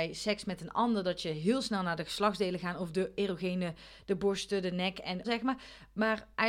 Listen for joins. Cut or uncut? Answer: cut